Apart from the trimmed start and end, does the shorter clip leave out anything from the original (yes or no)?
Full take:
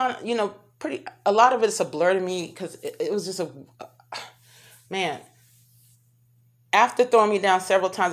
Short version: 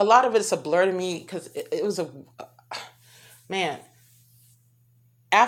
yes